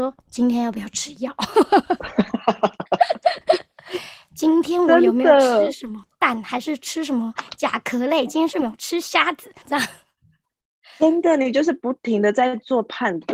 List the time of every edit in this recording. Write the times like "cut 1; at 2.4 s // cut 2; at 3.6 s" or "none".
cut 1; at 9.6 s